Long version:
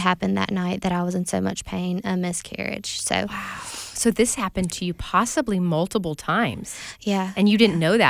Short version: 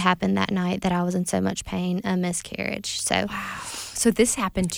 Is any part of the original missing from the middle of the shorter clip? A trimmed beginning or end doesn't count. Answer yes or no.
no